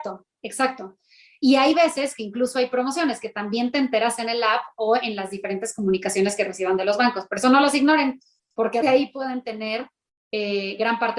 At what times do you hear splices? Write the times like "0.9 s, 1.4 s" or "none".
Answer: 8.8 s

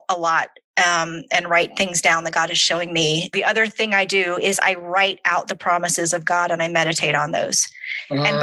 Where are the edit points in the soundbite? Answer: 3.3 s

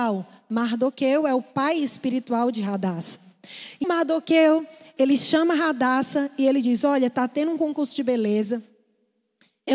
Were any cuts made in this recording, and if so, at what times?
3.8 s

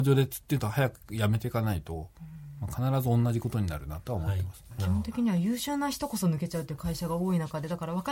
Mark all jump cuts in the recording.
none

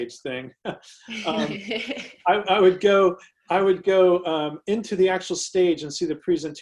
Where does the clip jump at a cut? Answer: none

